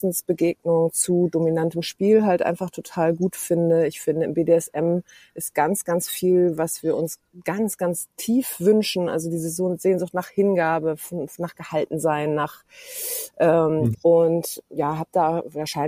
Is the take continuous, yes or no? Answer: no